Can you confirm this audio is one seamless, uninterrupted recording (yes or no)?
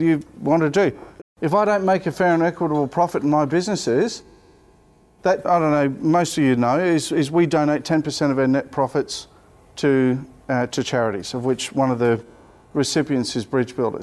no